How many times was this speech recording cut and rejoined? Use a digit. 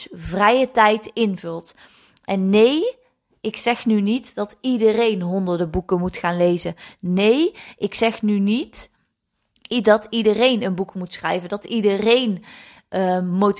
0